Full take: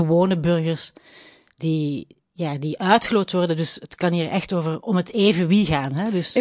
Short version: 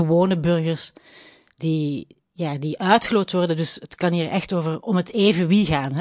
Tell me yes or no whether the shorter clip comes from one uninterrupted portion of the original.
yes